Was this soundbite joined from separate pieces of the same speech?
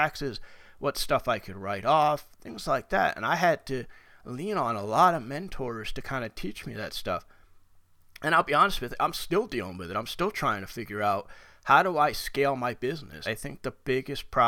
yes; 1 cut; at 13.2 s

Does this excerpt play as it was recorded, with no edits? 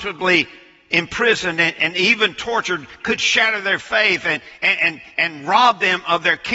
yes; 0 cuts

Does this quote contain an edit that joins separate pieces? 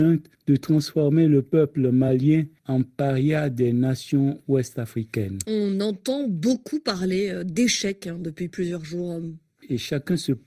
no; 0 cuts

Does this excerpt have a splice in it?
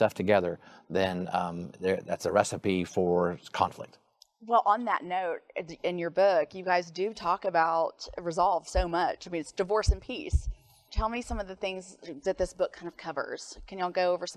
yes; 1 cut; at 10.9 s

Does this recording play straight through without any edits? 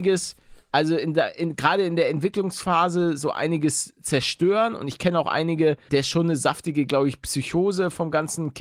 no; 1 cut; at 5.9 s

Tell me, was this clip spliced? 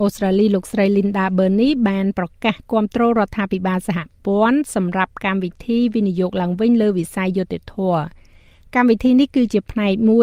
no; 0 cuts

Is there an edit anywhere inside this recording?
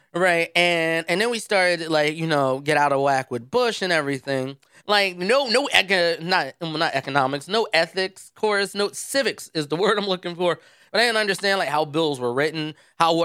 yes; 2 cuts; at 4.8 s, 10.9 s

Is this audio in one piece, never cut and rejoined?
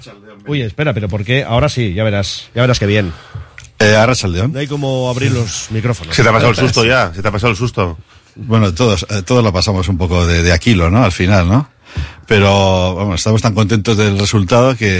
yes; 0 cuts

